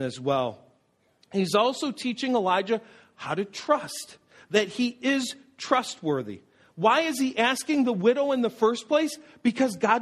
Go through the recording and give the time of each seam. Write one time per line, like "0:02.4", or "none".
none